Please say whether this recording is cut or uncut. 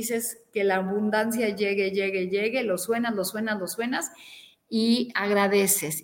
uncut